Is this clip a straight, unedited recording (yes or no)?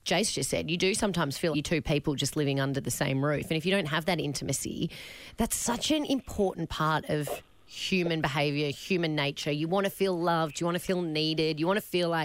no